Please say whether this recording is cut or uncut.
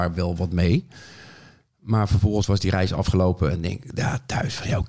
uncut